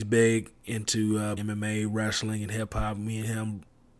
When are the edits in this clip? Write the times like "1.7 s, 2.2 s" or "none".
1.4 s